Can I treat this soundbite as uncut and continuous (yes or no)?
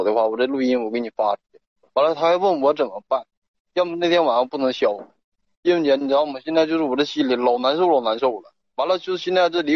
yes